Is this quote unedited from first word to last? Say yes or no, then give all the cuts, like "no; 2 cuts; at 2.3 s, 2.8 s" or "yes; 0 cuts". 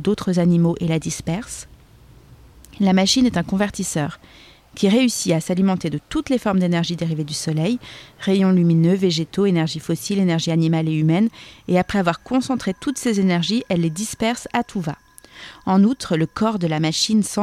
yes; 0 cuts